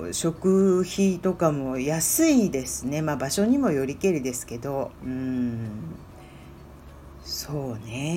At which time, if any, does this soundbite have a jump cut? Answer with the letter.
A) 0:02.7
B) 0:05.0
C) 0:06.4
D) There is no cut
B